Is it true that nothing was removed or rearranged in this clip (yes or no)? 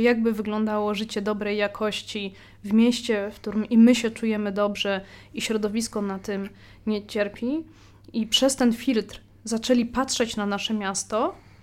yes